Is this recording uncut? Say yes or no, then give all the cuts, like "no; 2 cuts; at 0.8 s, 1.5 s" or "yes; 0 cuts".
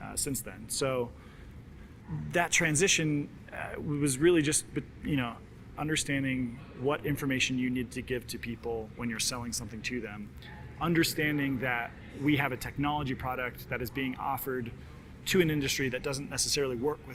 no; 1 cut; at 5.8 s